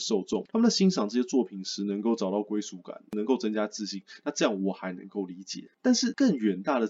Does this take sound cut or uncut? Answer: uncut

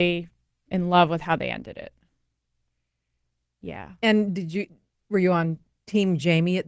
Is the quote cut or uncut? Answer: cut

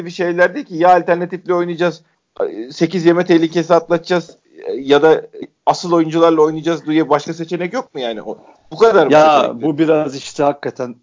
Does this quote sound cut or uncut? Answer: uncut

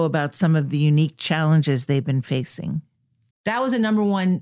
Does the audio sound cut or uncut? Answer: cut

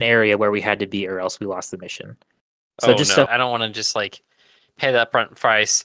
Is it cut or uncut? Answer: cut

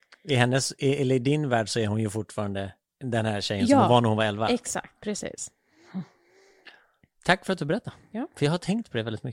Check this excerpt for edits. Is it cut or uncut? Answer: uncut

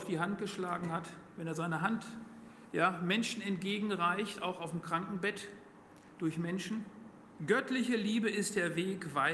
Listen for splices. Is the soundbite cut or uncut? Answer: cut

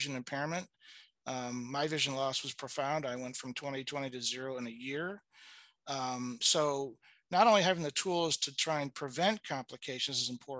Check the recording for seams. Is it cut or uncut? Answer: uncut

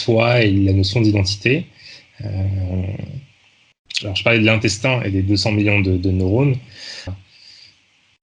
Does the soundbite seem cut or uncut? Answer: cut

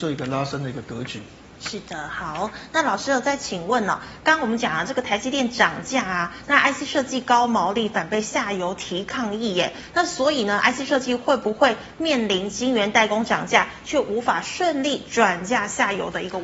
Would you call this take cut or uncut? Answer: uncut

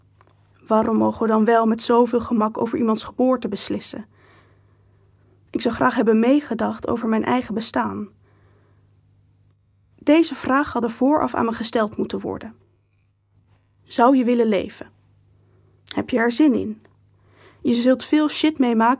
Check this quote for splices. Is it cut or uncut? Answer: uncut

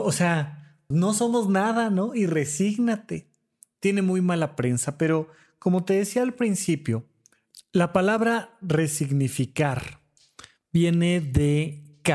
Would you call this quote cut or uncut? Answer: cut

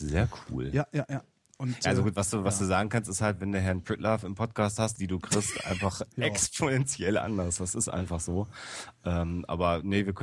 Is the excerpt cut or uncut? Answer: cut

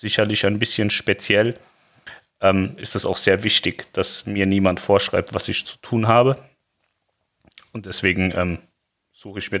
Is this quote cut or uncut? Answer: uncut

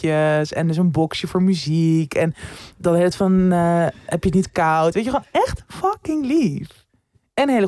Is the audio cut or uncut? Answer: uncut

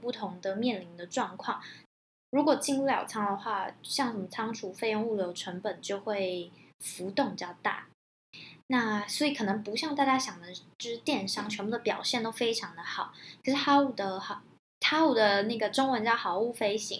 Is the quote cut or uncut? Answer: uncut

